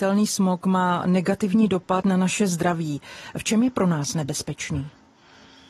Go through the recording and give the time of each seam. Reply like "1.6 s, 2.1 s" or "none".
none